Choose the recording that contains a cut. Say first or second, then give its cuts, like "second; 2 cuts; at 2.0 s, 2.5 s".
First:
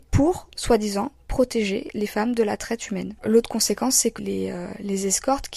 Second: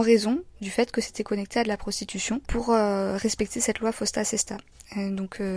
first; 2 cuts; at 3.2 s, 4.2 s